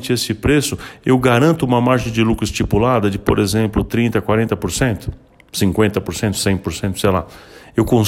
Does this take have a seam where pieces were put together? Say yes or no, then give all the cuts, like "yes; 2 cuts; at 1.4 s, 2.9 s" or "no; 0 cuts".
no; 0 cuts